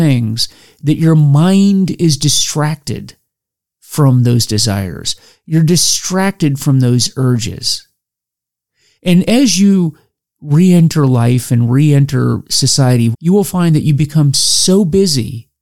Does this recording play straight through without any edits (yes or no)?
no